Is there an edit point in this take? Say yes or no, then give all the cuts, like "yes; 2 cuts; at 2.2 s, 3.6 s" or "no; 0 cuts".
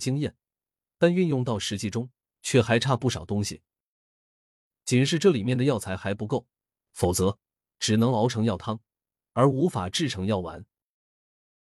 yes; 1 cut; at 6.7 s